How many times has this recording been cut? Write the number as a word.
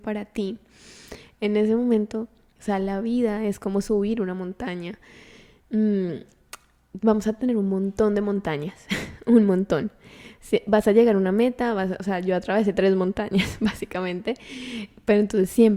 one